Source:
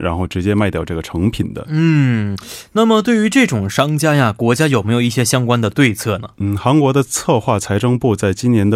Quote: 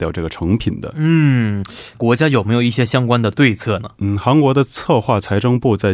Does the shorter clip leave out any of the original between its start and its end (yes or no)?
yes